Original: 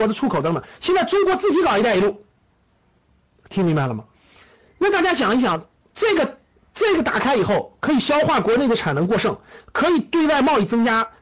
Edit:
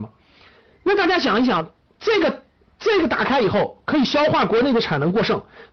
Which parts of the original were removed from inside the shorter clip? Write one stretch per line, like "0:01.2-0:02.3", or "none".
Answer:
none

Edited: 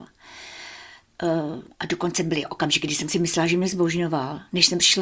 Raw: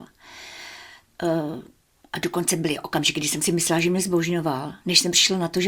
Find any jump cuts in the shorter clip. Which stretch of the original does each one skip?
0:01.7-0:02.0

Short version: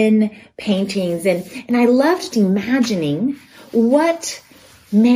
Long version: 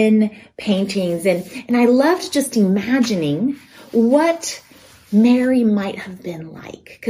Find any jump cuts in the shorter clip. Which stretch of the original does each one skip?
0:02.3-0:02.5

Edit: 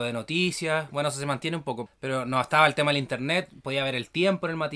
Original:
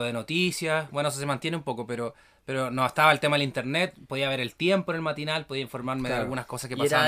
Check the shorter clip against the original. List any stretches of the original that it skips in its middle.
0:01.9-0:02.3

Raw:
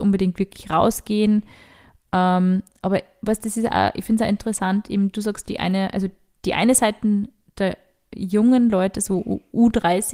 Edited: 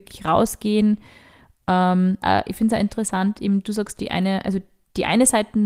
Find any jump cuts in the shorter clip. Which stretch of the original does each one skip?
0:02.7-0:03.7

